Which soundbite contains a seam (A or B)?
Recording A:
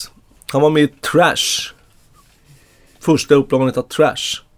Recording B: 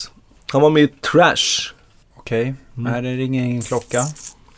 B